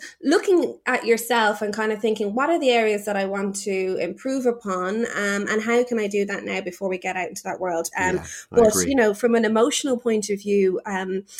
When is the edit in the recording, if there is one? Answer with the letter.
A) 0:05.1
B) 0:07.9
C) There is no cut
B